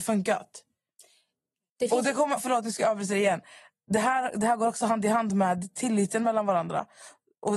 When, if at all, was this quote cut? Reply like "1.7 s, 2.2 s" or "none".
2.4 s